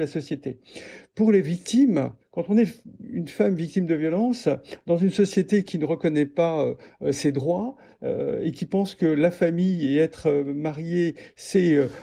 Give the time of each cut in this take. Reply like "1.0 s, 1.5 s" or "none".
none